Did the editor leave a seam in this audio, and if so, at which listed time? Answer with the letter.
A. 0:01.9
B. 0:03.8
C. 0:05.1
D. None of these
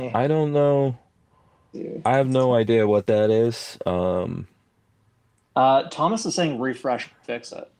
D